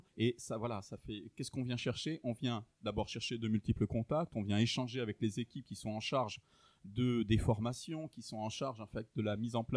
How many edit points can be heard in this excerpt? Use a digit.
0